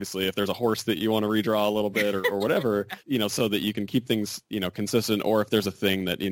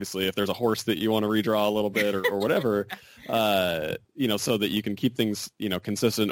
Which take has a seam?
first; 1 cut; at 3.0 s

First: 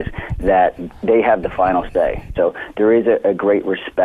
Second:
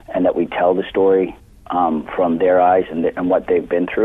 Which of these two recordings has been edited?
first; 1 cut; at 2.3 s

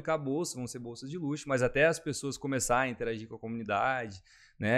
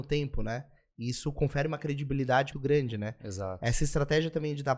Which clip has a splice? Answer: second; 1 cut; at 2.5 s

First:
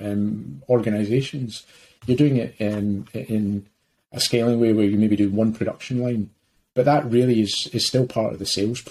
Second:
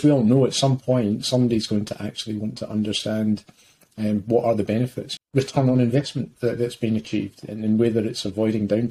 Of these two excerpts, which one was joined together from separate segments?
second; 1 cut; at 5.2 s

